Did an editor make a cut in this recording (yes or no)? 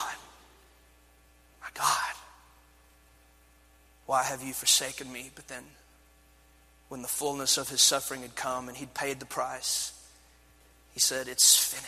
no